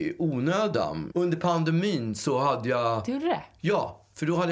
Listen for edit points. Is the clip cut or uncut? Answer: cut